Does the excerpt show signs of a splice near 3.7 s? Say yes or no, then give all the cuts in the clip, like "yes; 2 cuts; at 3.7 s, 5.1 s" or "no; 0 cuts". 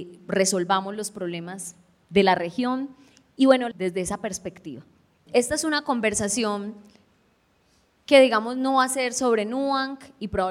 yes; 2 cuts; at 3.7 s, 5.3 s